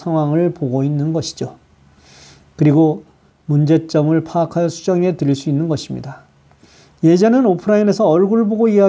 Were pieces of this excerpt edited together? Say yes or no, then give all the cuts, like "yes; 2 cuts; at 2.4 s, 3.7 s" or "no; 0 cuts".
no; 0 cuts